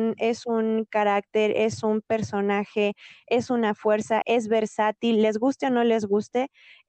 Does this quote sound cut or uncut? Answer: cut